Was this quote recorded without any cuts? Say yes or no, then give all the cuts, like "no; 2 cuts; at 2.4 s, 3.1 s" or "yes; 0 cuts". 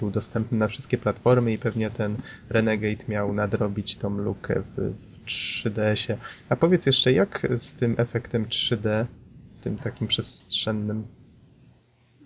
yes; 0 cuts